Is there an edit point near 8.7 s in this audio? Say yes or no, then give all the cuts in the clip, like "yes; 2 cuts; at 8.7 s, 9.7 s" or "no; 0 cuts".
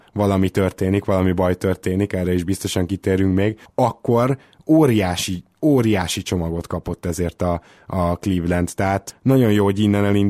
no; 0 cuts